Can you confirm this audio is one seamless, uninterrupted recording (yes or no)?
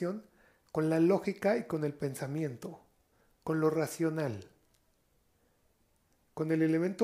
yes